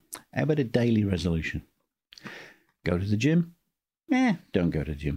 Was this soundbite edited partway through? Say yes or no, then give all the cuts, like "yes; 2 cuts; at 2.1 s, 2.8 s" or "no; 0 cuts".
no; 0 cuts